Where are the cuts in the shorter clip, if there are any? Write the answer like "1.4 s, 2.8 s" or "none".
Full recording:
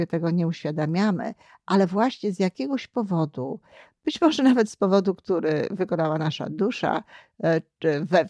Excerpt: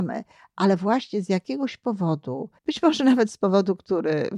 2.6 s